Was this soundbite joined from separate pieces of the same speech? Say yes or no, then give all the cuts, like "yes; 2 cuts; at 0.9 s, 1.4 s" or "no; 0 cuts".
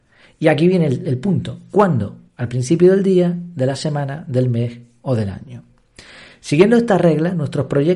yes; 1 cut; at 2.3 s